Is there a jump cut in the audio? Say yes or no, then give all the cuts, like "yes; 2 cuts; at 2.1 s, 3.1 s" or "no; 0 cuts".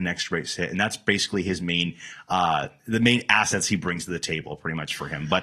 no; 0 cuts